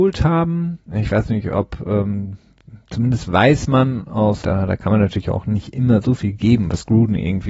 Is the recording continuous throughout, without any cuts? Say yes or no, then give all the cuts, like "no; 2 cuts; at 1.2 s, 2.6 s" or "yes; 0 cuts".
no; 1 cut; at 4.4 s